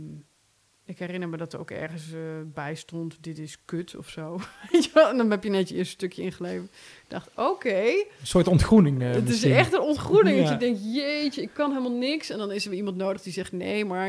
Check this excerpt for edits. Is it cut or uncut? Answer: uncut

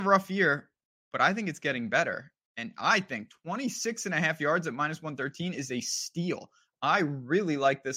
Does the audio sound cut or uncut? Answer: uncut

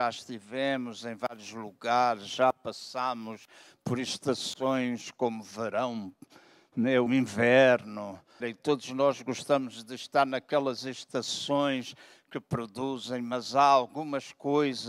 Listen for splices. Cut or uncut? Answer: cut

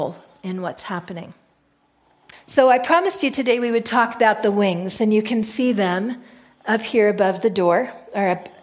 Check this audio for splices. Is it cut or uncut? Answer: cut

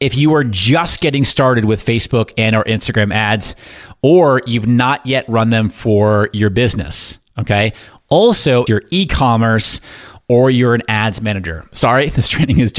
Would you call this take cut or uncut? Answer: cut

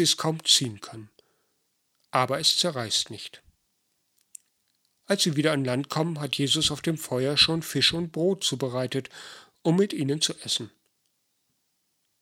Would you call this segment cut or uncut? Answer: uncut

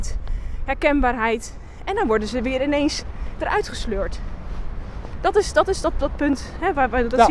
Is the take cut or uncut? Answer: uncut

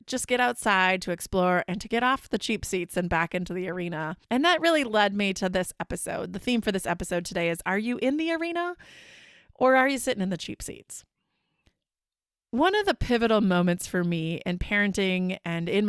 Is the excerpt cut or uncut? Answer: uncut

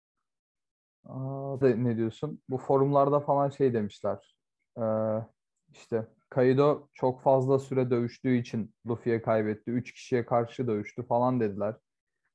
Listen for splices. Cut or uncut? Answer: cut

